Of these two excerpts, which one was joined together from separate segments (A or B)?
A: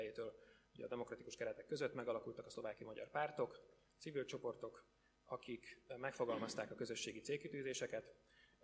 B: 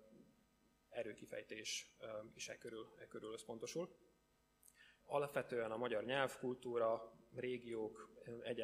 B